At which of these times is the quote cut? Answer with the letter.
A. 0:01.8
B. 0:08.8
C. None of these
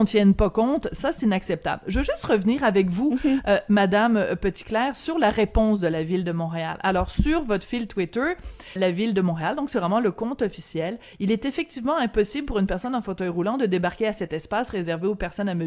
B